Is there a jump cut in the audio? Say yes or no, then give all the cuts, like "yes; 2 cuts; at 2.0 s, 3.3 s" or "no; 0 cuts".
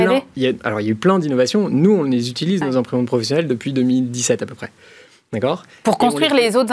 no; 0 cuts